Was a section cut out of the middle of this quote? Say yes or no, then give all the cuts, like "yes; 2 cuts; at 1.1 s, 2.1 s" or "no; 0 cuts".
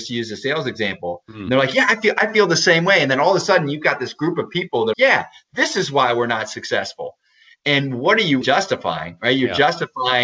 yes; 2 cuts; at 4.9 s, 8.4 s